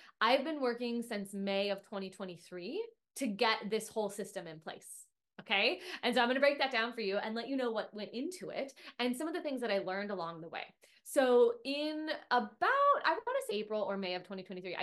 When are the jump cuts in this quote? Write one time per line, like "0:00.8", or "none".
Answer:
0:13.5